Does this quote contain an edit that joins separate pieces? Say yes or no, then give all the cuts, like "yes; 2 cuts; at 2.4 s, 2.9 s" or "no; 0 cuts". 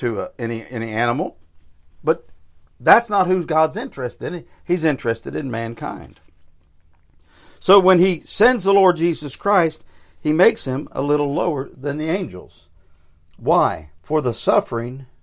yes; 1 cut; at 14.0 s